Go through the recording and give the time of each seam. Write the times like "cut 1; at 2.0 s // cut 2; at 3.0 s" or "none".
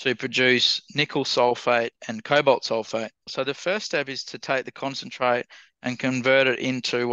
cut 1; at 3.3 s